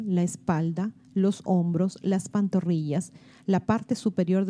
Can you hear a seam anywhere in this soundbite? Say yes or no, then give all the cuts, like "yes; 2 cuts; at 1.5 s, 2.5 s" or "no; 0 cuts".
no; 0 cuts